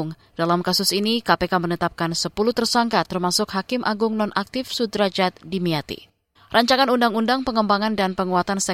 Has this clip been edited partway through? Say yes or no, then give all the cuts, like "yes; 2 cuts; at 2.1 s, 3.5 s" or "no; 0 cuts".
yes; 1 cut; at 6.4 s